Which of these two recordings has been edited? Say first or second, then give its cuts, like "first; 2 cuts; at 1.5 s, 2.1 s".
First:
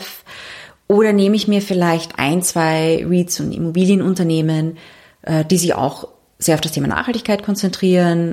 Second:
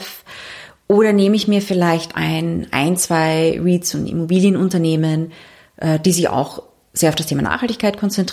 first; 1 cut; at 2.2 s